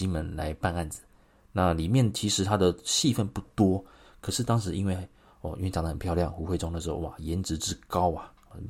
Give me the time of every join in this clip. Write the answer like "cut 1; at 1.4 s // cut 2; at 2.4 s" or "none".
none